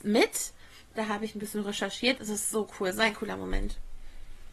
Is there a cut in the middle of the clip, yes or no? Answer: yes